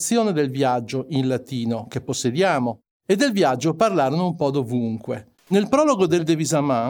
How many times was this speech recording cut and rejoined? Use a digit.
1